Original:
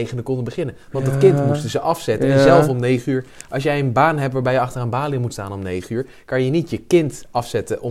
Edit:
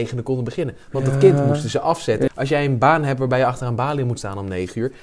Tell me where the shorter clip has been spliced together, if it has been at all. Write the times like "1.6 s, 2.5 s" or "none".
2.3 s